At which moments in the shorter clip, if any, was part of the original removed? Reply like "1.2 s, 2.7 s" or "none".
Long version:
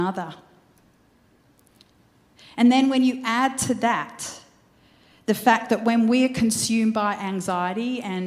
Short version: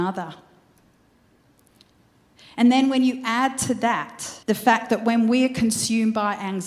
4.4 s

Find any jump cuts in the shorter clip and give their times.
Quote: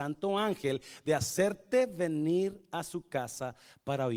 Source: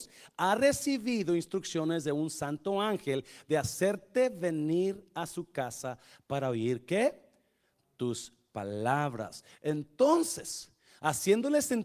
none

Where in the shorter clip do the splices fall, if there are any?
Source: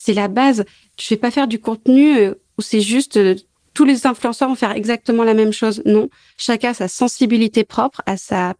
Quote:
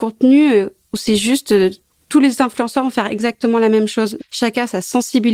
4.2 s

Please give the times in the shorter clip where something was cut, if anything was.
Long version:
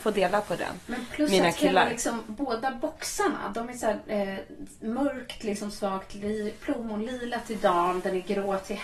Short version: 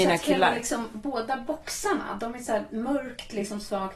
2.7 s

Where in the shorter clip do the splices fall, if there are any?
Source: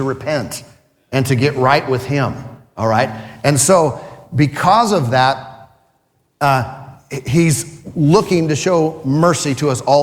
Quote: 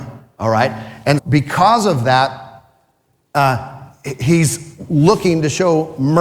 1.2 s

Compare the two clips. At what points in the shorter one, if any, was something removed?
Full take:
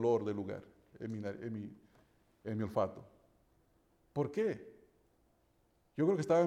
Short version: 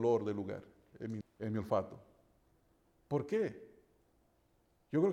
1.2 s

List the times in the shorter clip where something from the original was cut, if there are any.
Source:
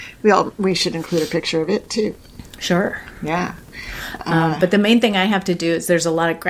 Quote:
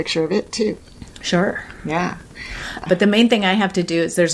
2.9 s

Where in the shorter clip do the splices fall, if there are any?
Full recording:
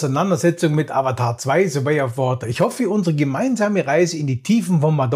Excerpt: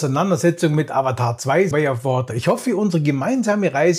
1.7 s

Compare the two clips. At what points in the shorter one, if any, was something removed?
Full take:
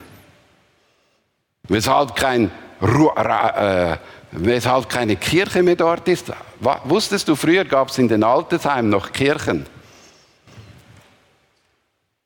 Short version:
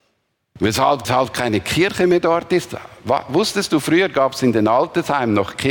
1.0 s

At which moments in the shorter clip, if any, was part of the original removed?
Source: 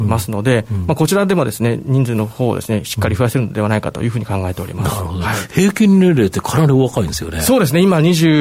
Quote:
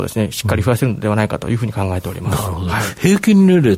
none

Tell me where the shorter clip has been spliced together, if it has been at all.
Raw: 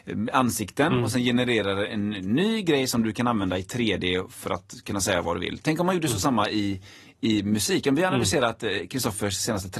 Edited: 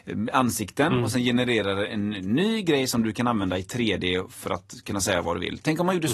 none

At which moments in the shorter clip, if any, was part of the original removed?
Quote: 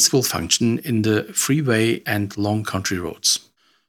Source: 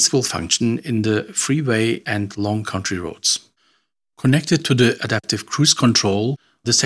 none

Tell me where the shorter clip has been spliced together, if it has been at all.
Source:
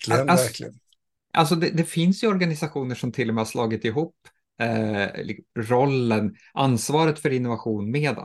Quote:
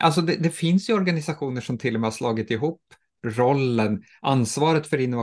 3.1 s

